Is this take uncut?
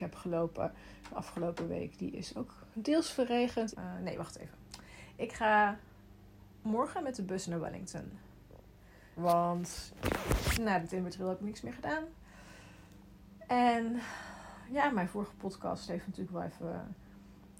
no; 2 cuts; at 3.7 s, 9.2 s

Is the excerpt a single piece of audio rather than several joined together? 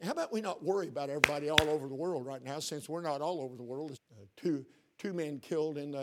no; 1 cut; at 3.9 s

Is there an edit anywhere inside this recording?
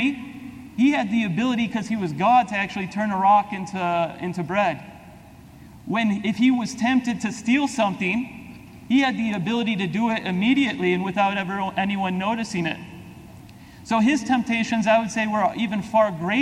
no; 0 cuts

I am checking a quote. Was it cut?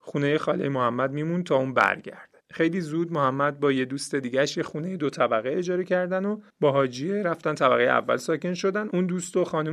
yes; 2 cuts; at 2.4 s, 6.5 s

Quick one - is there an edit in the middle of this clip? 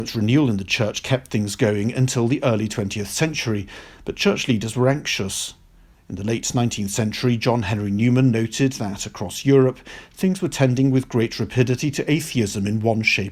no; 0 cuts

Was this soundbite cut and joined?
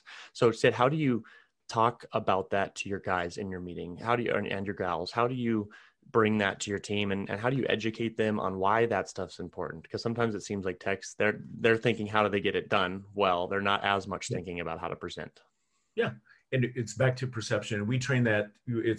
no; 0 cuts

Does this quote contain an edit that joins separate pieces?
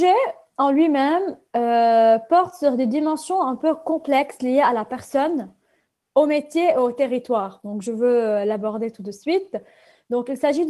no; 0 cuts

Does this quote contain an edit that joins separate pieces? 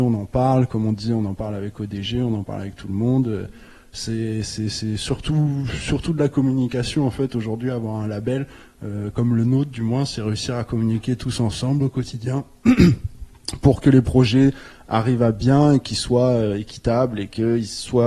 no; 0 cuts

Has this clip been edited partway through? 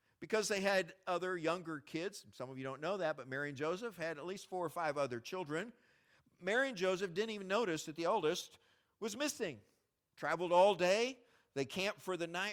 no; 0 cuts

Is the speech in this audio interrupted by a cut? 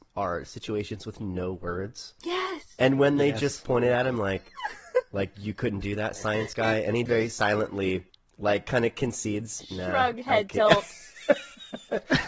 yes; 1 cut; at 7.1 s

